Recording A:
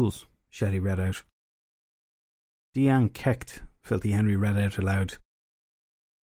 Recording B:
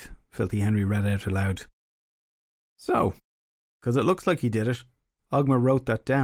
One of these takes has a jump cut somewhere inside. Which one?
A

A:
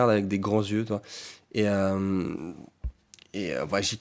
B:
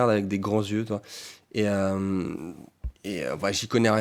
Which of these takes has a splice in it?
B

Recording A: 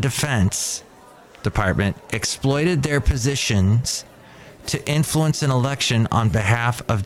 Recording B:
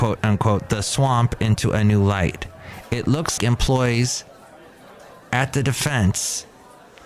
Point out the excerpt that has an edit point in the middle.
B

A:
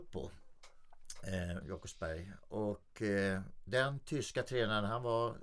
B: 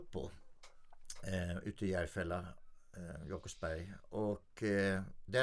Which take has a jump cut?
A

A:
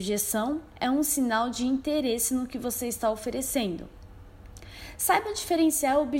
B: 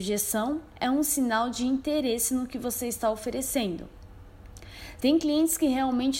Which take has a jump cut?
B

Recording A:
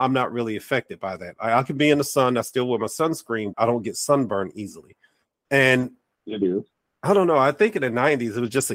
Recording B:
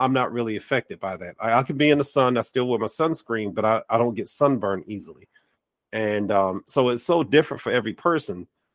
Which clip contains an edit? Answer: A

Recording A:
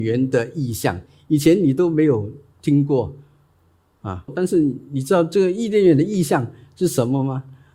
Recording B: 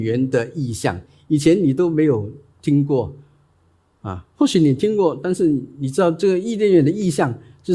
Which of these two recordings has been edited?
A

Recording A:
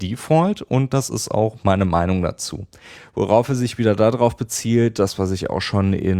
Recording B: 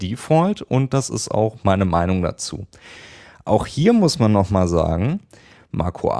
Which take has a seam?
A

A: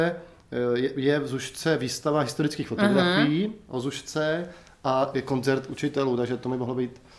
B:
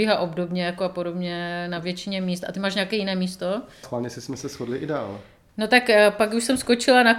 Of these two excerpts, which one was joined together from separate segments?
B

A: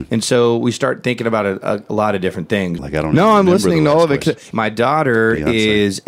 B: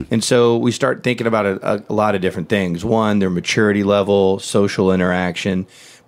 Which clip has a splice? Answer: A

